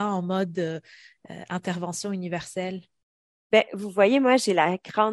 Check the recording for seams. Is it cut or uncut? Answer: uncut